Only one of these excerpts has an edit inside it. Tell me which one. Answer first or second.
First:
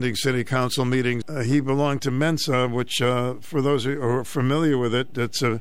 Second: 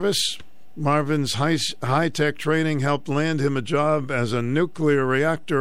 first